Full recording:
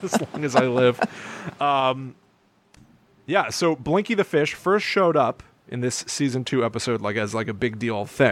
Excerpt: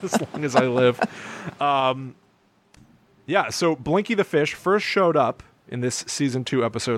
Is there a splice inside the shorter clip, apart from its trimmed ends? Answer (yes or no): no